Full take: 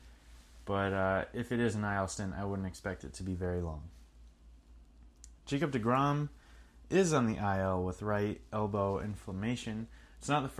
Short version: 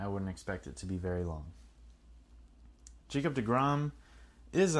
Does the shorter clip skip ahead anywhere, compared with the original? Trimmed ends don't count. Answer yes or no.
no